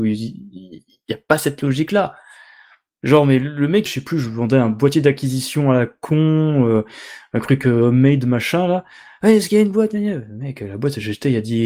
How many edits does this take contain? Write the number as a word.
one